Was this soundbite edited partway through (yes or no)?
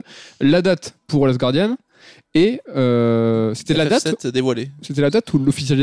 no